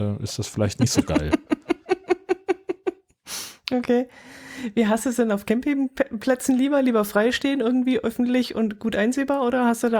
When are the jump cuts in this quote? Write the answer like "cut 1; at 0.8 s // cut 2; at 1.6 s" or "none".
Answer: none